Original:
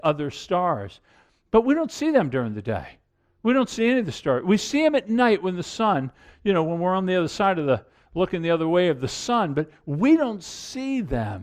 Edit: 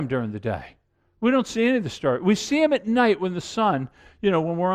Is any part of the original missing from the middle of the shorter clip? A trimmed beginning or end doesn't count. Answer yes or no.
no